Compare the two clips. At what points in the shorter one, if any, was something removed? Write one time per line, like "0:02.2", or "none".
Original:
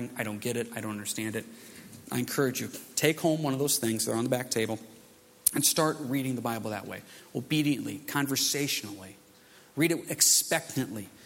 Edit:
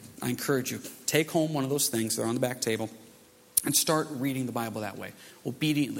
none